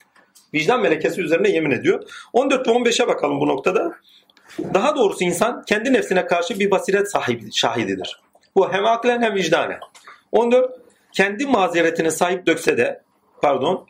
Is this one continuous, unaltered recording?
yes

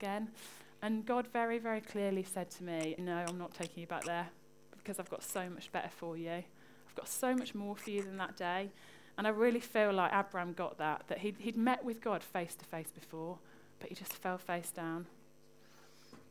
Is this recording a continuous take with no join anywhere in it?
no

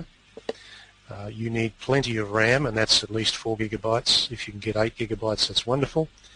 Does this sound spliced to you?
no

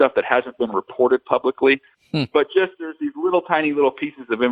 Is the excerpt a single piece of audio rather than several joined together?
no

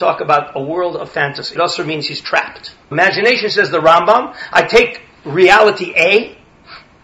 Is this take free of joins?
no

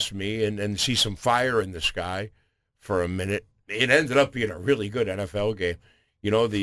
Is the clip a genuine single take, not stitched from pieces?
no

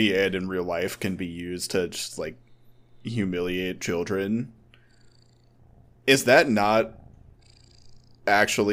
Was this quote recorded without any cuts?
yes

